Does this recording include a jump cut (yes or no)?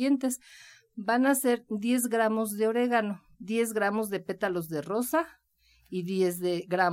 no